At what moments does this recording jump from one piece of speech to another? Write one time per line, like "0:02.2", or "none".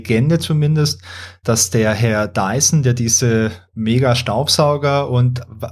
none